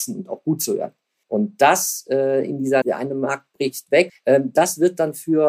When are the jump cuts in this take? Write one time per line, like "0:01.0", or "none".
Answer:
0:01.2
0:02.8
0:04.1

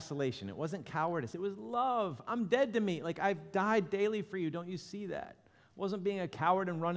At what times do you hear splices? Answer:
none

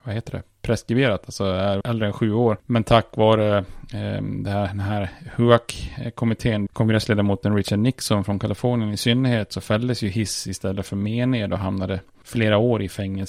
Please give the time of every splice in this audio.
0:01.8
0:06.7

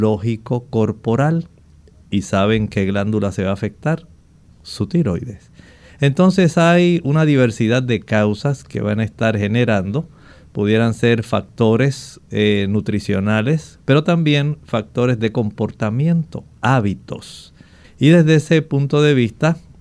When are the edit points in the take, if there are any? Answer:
0:13.8
0:17.8

